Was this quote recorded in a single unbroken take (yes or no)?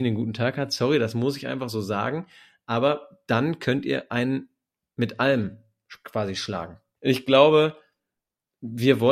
no